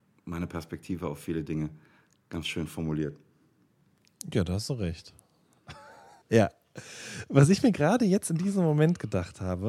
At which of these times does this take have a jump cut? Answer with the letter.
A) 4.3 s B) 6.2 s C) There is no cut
B